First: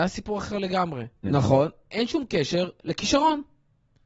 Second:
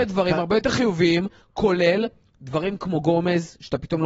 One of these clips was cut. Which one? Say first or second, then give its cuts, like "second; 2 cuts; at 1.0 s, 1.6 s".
first; 1 cut; at 1.2 s